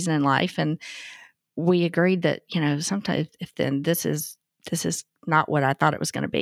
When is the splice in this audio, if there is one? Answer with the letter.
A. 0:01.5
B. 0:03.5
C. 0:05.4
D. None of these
B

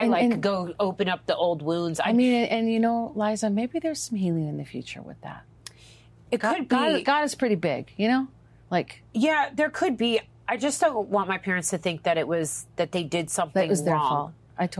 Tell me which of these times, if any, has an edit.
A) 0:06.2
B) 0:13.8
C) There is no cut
C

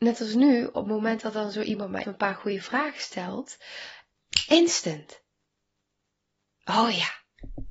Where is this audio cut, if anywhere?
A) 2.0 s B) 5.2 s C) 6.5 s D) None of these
A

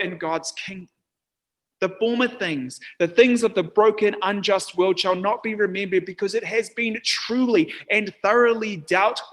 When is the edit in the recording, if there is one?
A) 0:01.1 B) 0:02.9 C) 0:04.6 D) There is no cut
D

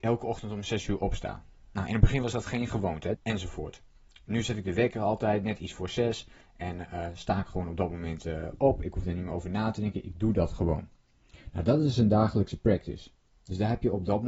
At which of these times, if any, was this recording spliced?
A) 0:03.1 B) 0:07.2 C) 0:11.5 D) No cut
A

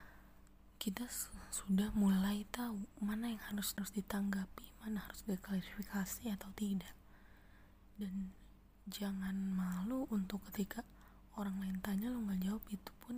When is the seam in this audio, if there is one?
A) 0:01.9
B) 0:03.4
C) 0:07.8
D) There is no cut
D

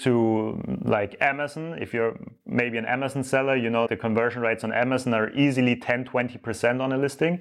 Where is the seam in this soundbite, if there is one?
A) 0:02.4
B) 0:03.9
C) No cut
B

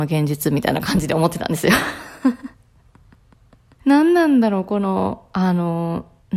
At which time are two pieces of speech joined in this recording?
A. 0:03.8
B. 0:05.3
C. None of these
A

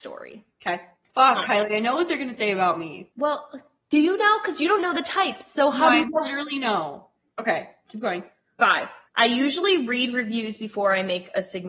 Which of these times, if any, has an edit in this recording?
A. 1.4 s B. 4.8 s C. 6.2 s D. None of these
B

